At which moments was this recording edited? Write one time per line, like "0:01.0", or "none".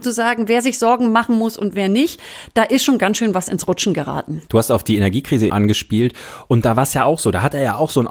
0:04.5
0:05.5